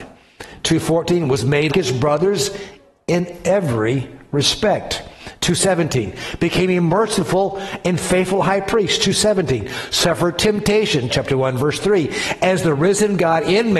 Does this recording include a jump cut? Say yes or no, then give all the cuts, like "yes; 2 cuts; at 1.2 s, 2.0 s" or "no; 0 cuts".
yes; 2 cuts; at 1.7 s, 11.1 s